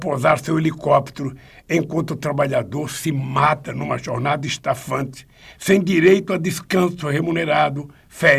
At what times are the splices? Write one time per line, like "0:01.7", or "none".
none